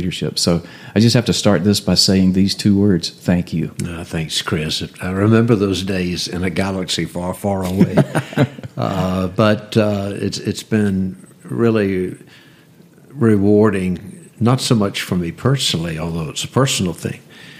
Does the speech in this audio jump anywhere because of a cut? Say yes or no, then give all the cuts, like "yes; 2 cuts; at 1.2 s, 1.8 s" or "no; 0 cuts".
yes; 1 cut; at 14.3 s